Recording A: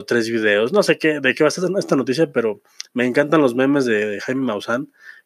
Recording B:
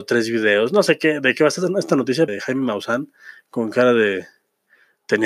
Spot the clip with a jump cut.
B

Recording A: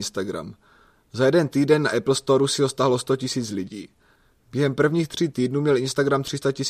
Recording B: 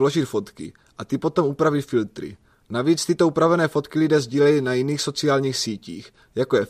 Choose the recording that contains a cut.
B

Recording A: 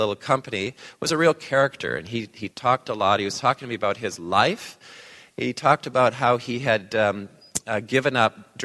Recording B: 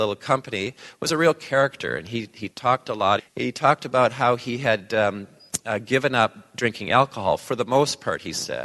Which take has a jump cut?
B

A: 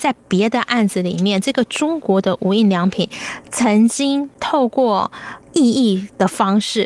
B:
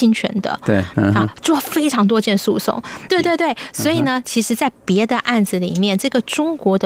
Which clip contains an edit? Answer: B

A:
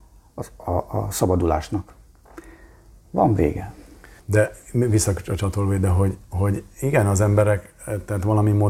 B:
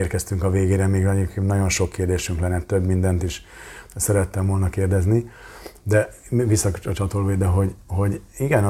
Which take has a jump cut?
A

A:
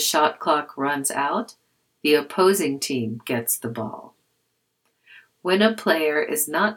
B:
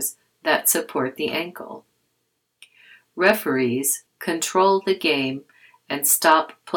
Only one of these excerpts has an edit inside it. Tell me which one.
B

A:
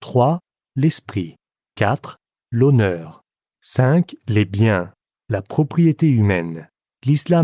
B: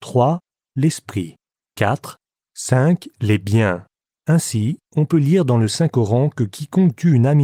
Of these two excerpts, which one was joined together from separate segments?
B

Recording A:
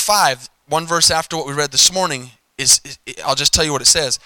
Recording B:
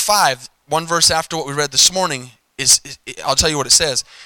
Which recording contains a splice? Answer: B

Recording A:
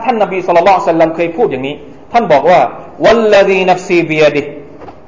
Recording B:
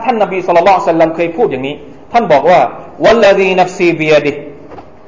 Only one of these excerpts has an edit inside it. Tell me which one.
B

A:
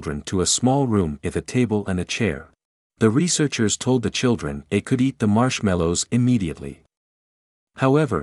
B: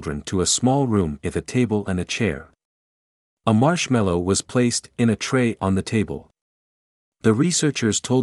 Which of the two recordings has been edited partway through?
A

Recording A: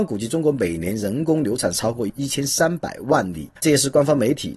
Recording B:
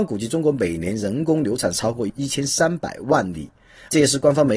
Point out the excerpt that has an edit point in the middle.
A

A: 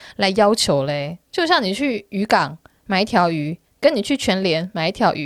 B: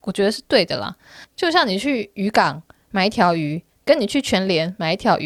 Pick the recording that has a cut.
B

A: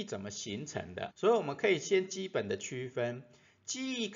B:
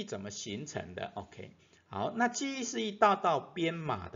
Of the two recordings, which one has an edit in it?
A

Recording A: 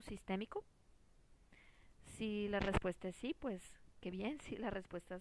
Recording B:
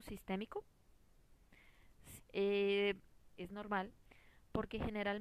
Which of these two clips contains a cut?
B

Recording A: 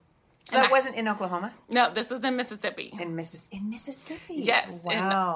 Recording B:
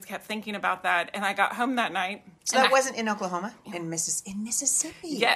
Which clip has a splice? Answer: B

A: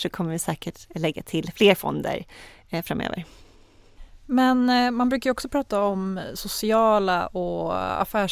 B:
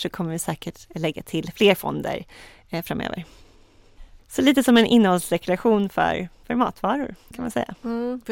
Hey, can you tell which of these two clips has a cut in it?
B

